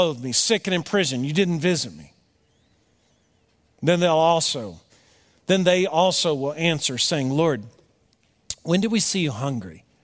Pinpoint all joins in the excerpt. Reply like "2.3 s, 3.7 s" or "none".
none